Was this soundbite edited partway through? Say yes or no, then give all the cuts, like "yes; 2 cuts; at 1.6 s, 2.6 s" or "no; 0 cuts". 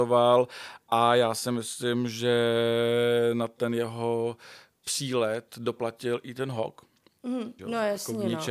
yes; 1 cut; at 7.6 s